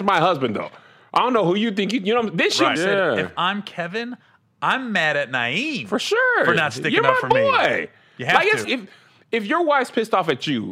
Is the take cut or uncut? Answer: cut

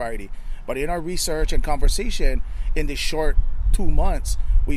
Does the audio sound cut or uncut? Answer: uncut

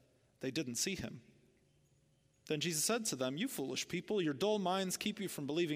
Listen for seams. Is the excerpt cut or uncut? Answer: uncut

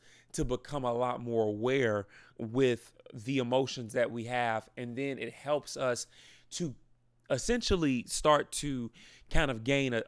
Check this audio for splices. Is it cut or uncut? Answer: uncut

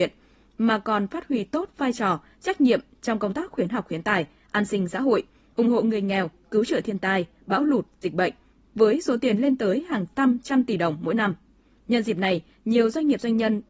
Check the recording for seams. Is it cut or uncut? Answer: uncut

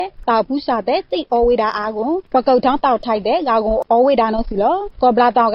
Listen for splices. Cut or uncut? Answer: uncut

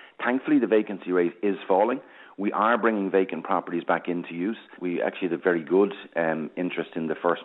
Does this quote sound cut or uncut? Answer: cut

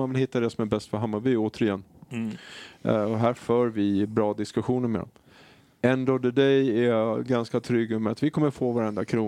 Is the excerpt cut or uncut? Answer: uncut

